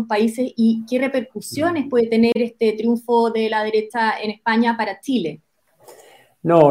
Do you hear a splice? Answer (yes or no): no